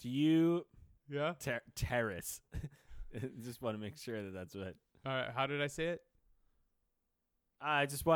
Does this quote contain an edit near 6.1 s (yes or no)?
no